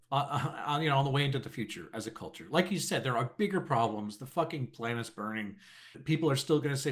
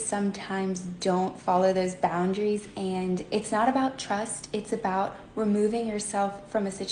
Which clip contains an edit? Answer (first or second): first